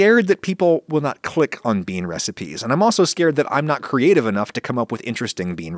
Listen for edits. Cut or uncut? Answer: uncut